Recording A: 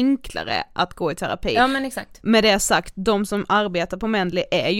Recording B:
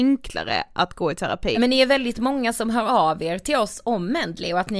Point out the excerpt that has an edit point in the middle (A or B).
B